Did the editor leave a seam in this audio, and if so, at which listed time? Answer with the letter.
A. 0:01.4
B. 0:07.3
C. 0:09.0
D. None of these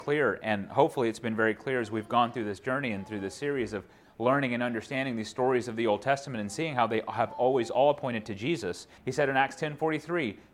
C